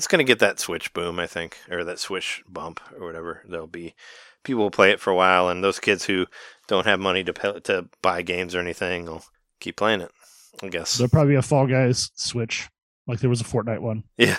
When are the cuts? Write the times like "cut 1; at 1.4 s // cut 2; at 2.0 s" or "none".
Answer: none